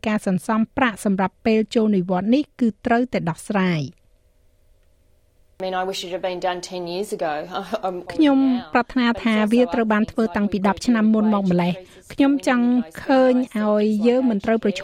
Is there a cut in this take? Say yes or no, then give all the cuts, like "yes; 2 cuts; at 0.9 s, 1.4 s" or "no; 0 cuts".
yes; 1 cut; at 8.1 s